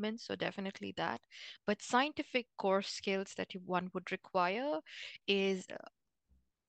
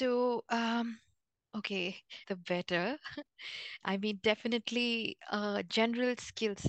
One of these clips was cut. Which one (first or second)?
second